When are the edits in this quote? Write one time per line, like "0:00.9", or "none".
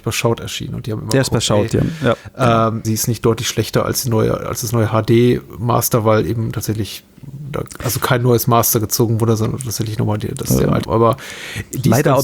0:02.8
0:10.8